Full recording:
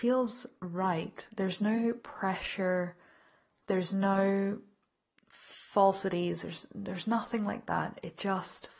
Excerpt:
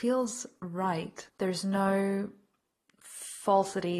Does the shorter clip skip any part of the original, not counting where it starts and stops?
yes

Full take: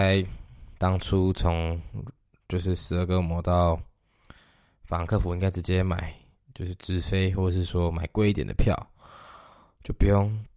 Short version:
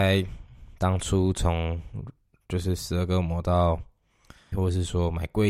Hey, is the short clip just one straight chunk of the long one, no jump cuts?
no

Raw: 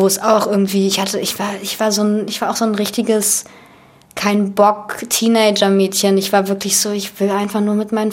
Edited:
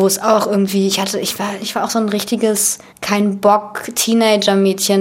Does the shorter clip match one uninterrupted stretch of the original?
no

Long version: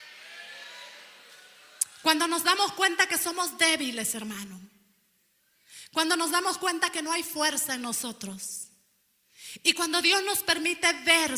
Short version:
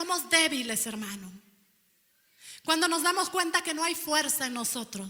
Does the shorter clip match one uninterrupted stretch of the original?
yes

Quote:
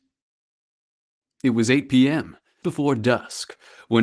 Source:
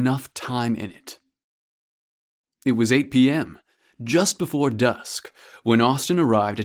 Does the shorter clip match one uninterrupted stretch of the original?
no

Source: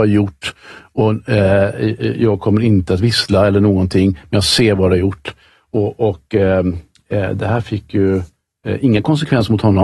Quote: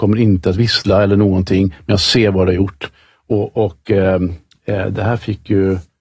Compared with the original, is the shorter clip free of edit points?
yes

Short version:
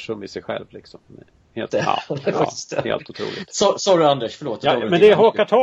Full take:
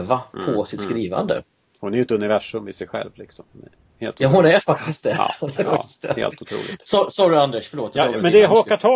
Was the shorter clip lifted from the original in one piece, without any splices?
no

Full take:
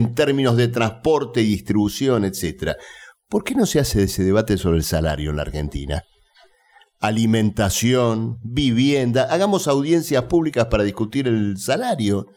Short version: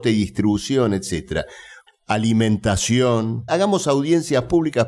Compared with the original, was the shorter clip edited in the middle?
yes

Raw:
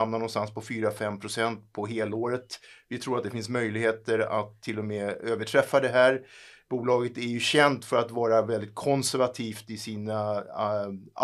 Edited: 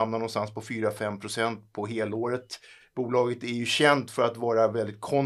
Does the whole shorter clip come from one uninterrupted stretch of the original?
no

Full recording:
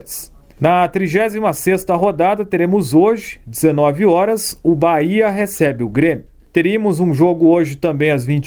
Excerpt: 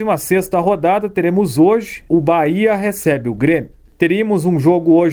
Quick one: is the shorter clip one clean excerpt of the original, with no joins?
no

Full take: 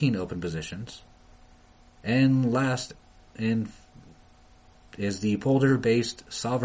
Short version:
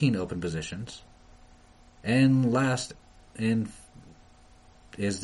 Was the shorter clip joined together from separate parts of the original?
no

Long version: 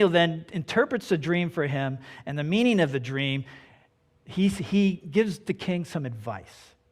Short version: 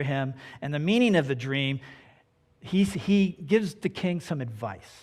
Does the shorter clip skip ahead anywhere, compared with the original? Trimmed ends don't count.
no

